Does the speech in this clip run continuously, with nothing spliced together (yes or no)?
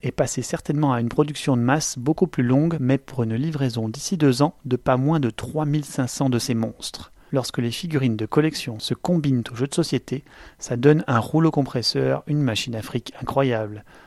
yes